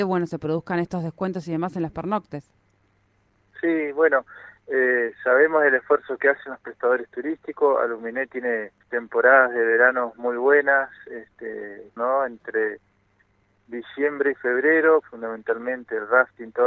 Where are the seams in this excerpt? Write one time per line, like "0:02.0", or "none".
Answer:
0:08.8
0:12.0
0:15.0